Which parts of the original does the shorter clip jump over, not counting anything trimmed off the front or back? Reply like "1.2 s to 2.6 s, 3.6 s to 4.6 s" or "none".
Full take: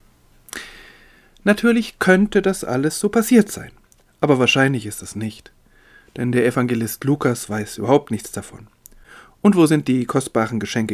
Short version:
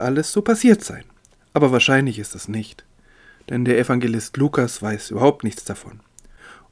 none